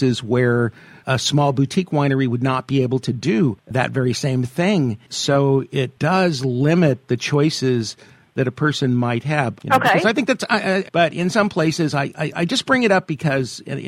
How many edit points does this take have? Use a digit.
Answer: 2